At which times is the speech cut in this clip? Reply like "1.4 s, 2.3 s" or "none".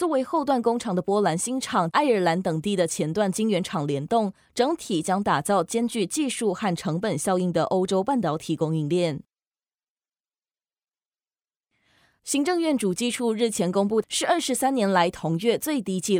1.9 s, 14.0 s